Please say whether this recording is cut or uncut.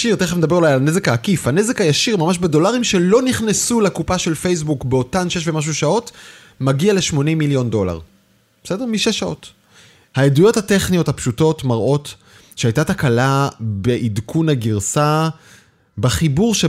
uncut